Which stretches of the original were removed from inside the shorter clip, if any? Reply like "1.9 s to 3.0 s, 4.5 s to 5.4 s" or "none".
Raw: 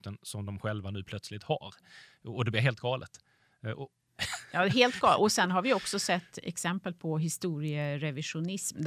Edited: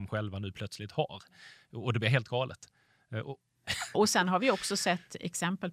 4.5 s to 5.2 s